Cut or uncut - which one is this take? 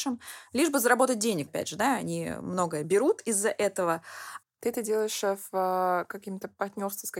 cut